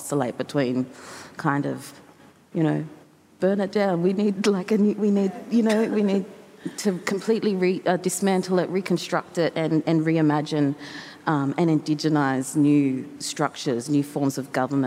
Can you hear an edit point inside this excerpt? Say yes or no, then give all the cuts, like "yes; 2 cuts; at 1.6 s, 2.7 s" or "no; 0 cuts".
no; 0 cuts